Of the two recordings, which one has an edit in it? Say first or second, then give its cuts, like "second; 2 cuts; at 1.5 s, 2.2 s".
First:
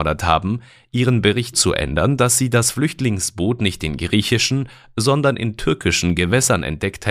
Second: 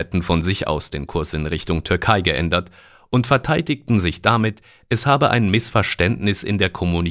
first; 1 cut; at 1.5 s